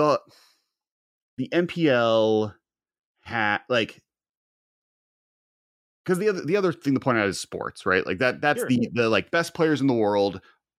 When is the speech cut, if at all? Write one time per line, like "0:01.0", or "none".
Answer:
none